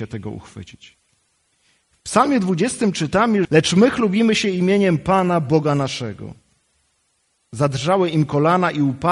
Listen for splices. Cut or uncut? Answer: cut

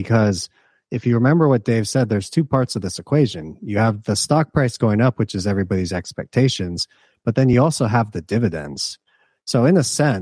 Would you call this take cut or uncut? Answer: uncut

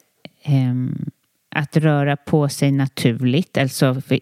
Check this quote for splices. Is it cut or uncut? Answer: uncut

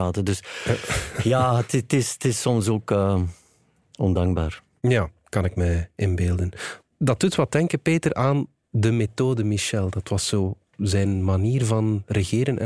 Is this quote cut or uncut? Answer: uncut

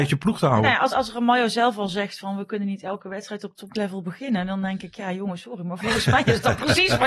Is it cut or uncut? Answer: uncut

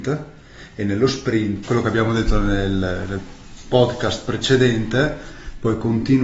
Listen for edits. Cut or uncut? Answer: cut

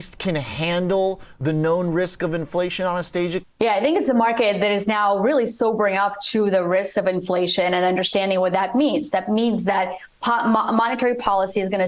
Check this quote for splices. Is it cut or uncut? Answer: cut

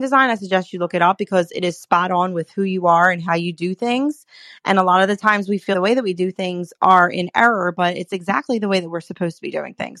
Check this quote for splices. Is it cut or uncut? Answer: cut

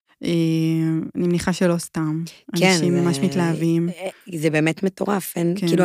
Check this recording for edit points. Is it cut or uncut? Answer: uncut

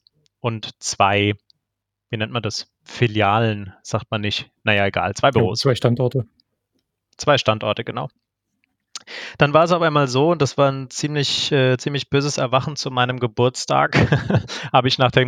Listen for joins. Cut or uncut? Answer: uncut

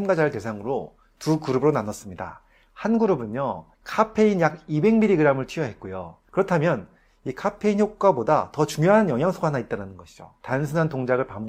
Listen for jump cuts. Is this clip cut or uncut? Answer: cut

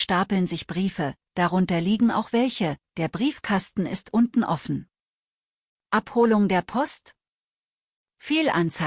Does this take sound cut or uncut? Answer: uncut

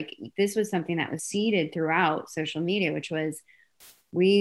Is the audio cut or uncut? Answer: cut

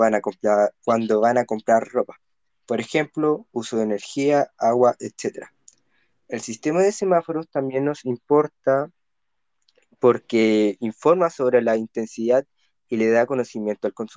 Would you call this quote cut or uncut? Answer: uncut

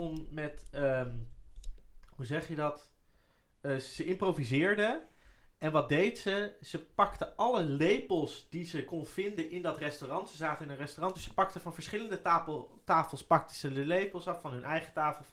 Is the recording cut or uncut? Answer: uncut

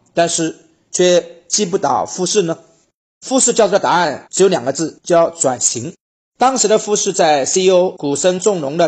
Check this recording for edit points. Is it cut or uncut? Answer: uncut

